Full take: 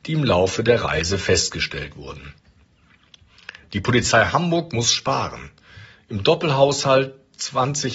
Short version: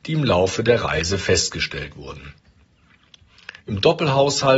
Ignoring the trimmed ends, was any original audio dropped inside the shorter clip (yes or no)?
yes